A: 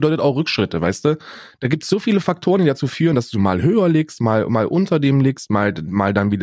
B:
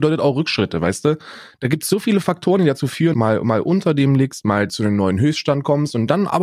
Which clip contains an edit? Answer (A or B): B